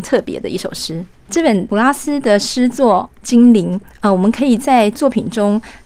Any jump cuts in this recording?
yes; 1 cut; at 1.3 s

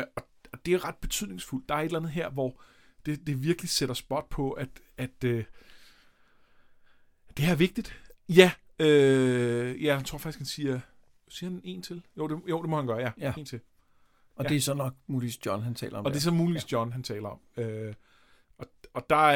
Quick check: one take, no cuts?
no; 1 cut; at 8.1 s

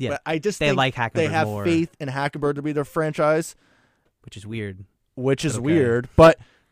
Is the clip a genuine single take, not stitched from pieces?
yes; 0 cuts

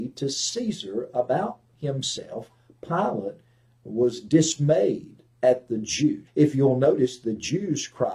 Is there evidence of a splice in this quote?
yes; 1 cut; at 6.3 s

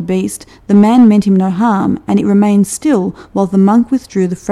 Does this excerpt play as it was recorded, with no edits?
yes; 0 cuts

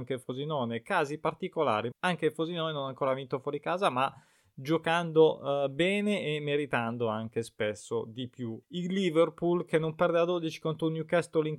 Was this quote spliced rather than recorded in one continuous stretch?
yes; 2 cuts; at 1.9 s, 8.6 s

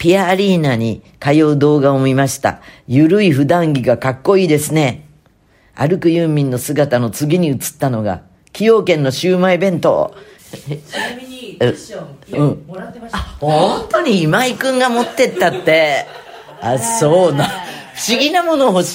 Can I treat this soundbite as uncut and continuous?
no; 2 cuts; at 10.4 s, 12.3 s

